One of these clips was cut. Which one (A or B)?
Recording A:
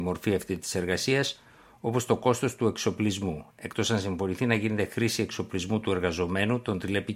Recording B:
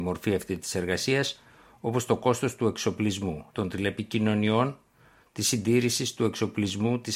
B